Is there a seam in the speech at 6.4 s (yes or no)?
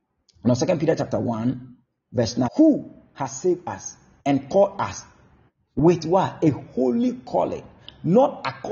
no